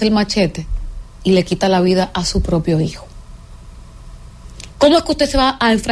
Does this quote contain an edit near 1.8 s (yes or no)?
no